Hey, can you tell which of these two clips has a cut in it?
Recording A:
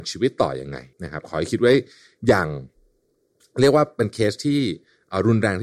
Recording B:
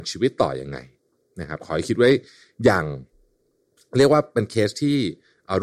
A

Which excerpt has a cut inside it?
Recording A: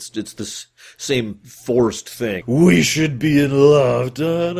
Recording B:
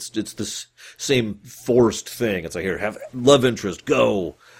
A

